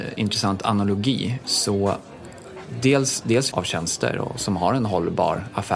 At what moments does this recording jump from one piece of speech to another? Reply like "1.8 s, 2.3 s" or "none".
1.4 s, 3.5 s